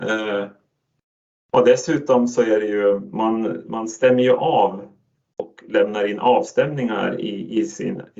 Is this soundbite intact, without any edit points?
yes; 0 cuts

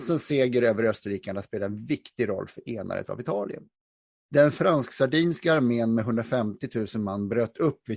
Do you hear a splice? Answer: no; 0 cuts

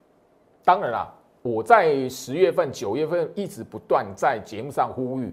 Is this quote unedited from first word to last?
yes; 0 cuts

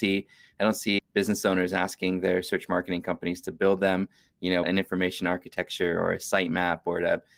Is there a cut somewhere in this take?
yes; 2 cuts; at 1.0 s, 4.6 s

